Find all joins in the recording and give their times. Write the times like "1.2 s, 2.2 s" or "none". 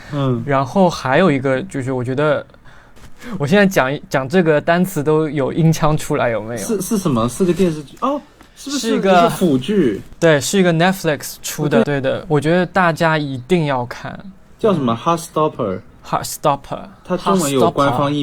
3.0 s, 11.8 s